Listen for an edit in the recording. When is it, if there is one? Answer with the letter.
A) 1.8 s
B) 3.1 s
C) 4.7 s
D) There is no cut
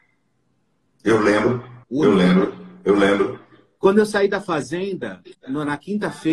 A